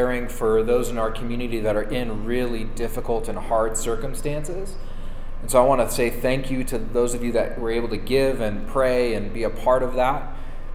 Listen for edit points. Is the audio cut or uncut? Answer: uncut